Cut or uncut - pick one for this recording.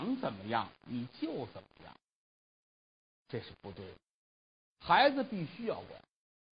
uncut